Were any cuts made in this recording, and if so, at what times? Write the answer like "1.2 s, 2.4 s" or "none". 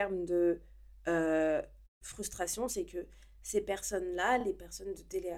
none